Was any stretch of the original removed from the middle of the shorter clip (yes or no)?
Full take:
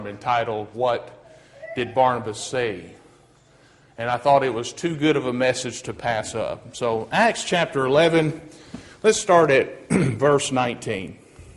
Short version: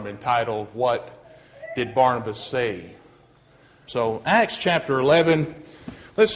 yes